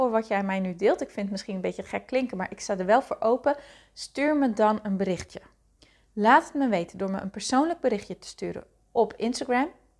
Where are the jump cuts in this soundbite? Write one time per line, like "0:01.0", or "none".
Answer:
none

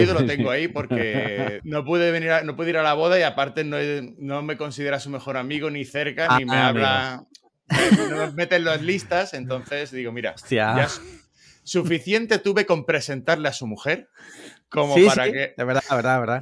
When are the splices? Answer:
0:01.6

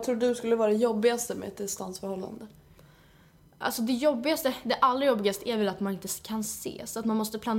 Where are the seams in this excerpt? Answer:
none

